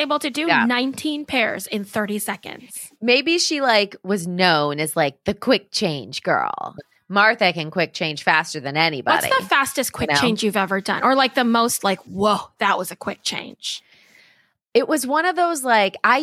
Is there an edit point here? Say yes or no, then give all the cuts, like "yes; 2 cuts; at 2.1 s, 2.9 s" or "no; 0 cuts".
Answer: yes; 1 cut; at 6.8 s